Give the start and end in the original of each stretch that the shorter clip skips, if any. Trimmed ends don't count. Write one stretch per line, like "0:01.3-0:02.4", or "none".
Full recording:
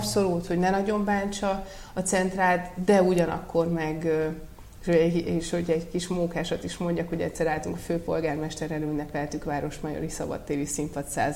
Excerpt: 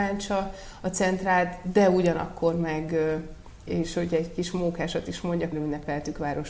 0:04.8-0:05.2
0:07.1-0:08.8